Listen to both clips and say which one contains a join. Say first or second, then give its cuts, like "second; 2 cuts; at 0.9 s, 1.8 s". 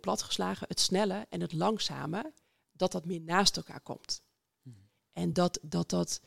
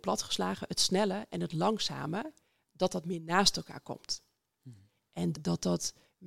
second; 1 cut; at 5.3 s